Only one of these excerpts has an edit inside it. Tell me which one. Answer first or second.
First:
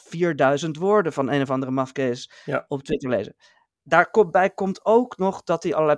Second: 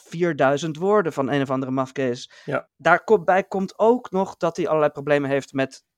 second